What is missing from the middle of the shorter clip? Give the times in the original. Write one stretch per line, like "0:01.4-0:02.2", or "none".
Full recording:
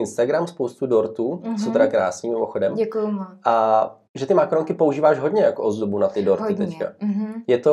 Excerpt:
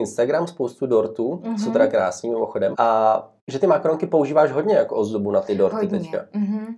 0:02.7-0:03.4